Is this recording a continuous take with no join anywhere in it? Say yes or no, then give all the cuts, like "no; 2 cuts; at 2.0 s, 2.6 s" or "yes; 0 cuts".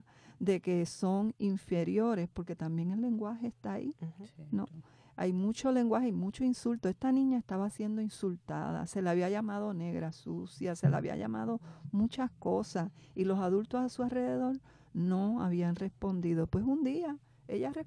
yes; 0 cuts